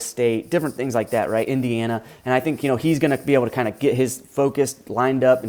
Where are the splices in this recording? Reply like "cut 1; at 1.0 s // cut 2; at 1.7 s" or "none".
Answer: none